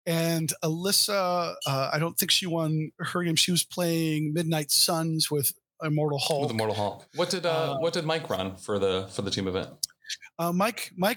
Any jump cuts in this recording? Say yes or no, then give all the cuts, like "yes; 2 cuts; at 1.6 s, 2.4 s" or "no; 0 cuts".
yes; 1 cut; at 7.1 s